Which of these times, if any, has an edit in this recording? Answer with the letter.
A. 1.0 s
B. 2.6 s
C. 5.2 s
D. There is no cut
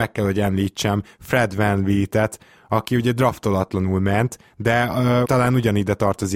C